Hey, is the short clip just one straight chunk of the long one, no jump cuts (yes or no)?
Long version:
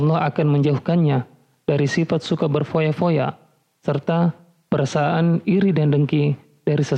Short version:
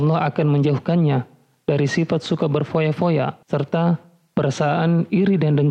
no